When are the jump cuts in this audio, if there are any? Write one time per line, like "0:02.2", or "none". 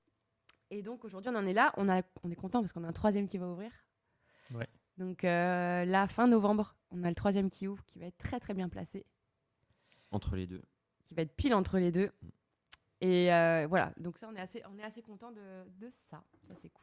none

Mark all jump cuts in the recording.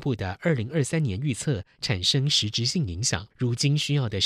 0:03.3

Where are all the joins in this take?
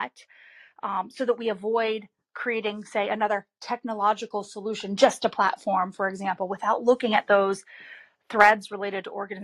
none

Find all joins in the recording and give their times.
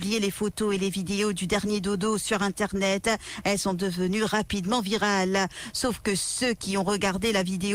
none

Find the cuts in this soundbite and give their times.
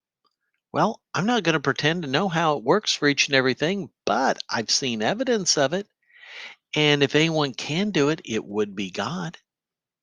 none

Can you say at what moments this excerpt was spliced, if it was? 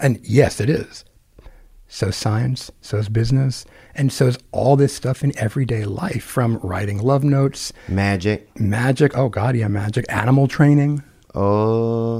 none

